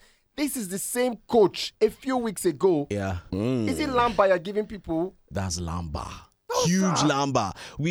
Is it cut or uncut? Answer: cut